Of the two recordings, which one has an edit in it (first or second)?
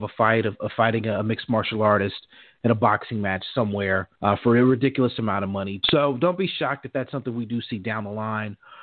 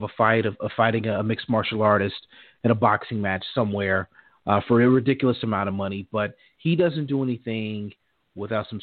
first